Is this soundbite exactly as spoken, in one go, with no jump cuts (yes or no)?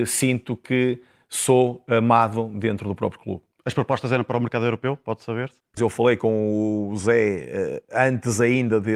no